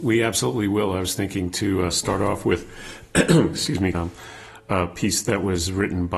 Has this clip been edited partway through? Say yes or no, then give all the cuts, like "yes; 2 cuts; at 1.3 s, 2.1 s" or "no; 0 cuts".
yes; 1 cut; at 3.9 s